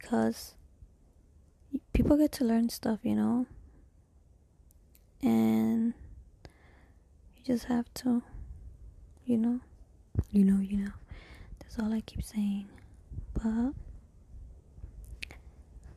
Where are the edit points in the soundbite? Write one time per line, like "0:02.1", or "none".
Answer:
none